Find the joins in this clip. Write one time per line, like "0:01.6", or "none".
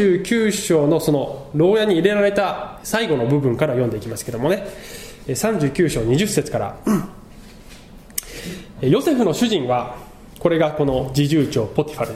0:02.8